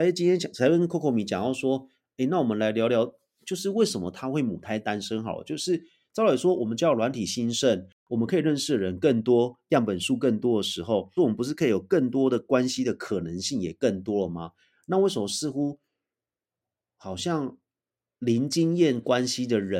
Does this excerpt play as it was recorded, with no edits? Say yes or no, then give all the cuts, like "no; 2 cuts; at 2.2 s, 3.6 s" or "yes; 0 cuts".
no; 1 cut; at 11.2 s